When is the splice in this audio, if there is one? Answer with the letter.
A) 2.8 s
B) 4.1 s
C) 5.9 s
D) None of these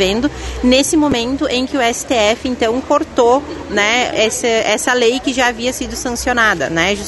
B